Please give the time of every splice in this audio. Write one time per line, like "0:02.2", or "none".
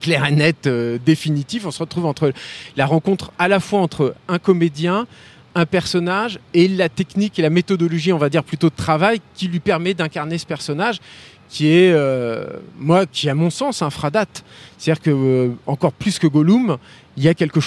none